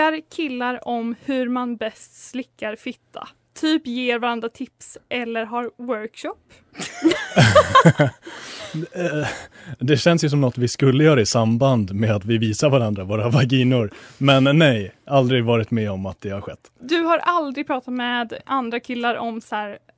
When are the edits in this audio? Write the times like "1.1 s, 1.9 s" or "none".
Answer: none